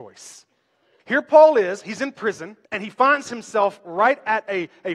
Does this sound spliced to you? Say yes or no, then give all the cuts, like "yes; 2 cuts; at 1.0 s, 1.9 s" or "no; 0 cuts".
yes; 2 cuts; at 1.0 s, 2.6 s